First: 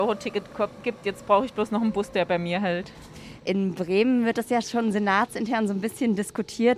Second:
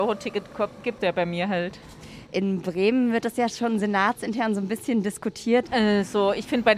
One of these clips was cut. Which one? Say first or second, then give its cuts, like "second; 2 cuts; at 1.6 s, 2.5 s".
second; 2 cuts; at 1.0 s, 5.7 s